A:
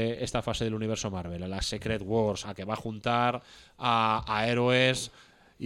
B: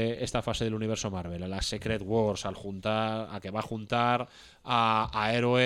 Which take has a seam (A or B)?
A